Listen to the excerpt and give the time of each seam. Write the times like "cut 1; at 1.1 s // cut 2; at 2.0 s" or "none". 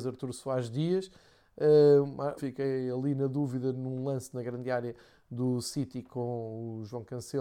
cut 1; at 2.4 s

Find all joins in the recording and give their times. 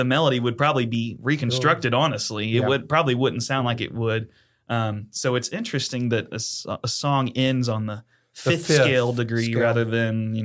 none

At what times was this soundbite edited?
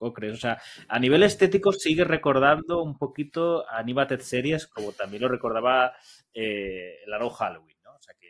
none

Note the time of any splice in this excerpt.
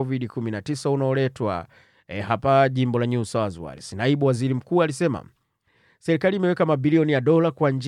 none

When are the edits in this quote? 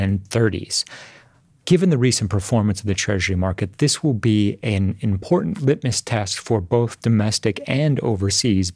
none

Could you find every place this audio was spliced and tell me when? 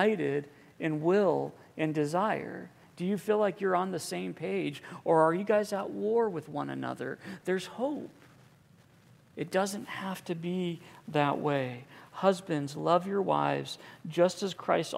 none

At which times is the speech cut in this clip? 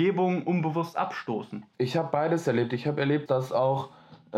cut 1; at 1.7 s // cut 2; at 3.3 s

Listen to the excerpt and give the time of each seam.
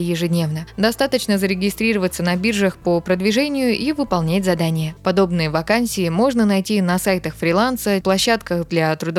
cut 1; at 5.0 s // cut 2; at 8.0 s

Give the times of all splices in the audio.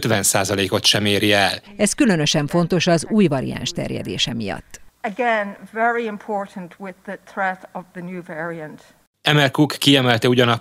cut 1; at 1.7 s

